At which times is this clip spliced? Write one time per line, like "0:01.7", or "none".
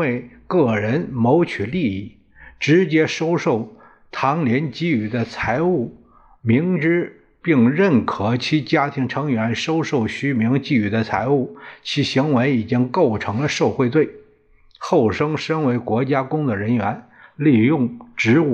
none